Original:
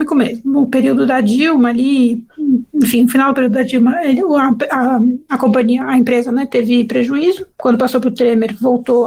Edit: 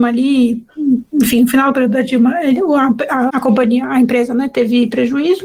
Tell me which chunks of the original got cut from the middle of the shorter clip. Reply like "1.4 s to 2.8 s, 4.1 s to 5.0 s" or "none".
4.9 s to 5.3 s